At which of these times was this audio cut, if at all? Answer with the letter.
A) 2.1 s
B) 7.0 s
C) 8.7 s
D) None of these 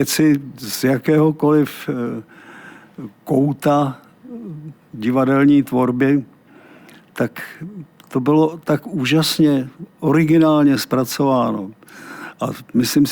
D